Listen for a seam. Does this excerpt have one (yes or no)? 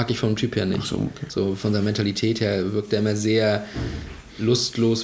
no